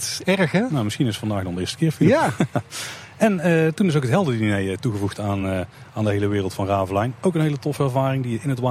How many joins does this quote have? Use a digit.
0